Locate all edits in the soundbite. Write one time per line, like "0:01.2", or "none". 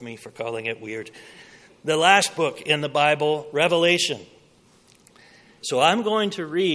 0:05.6